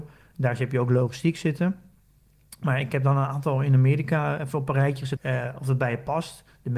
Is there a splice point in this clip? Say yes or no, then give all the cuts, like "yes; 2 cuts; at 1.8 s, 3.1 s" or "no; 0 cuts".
yes; 1 cut; at 5.2 s